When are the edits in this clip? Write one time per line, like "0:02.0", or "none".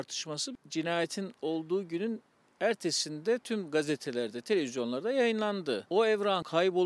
none